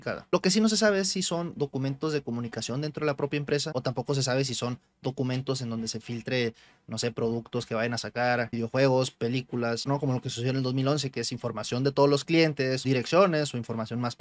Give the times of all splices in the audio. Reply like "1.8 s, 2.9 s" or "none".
9.9 s, 12.8 s